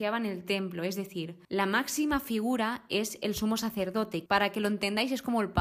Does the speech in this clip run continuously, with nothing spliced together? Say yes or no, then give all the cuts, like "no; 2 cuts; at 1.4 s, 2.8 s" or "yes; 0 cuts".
no; 2 cuts; at 1.4 s, 4.3 s